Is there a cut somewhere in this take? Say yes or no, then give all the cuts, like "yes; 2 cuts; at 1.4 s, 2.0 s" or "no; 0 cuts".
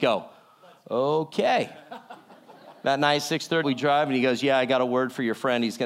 yes; 1 cut; at 3.6 s